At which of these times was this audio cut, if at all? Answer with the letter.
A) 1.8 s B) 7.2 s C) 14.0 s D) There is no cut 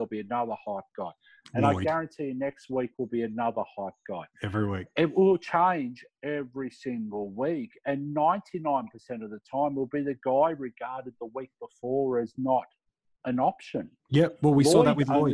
C